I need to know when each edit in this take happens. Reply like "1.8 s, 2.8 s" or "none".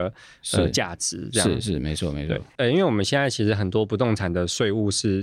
2.6 s